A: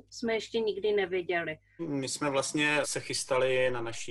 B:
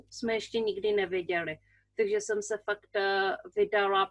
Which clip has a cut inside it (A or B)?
A